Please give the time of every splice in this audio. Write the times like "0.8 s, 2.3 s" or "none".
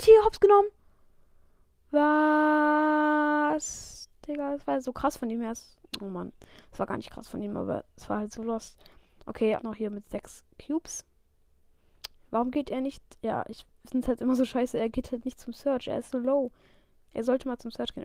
9.6 s